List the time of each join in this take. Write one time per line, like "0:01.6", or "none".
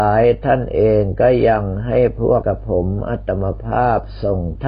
0:02.4